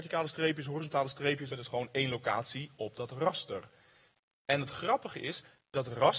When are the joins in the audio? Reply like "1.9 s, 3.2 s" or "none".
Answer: 1.5 s

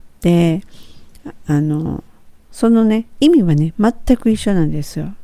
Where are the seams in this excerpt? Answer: 2.4 s

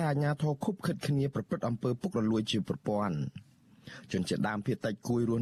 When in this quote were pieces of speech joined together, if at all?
none

